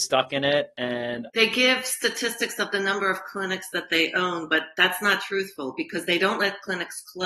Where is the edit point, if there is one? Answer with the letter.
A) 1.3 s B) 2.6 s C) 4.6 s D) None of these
A